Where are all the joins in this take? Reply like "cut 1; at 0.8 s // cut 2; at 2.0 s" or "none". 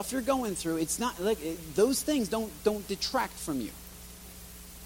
none